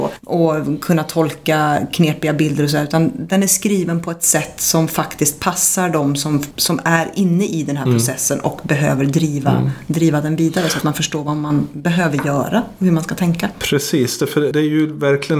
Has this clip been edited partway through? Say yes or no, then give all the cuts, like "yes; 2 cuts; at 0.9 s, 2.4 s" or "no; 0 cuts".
no; 0 cuts